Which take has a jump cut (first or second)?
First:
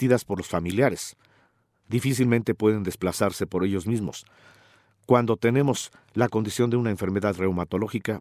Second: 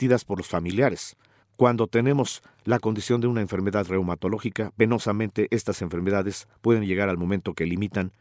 second